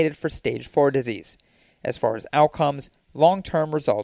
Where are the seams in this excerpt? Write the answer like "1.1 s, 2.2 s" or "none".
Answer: none